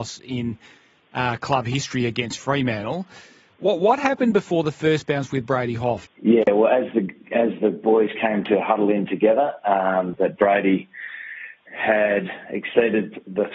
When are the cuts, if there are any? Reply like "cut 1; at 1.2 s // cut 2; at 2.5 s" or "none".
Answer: cut 1; at 6.1 s // cut 2; at 10.1 s // cut 3; at 11.7 s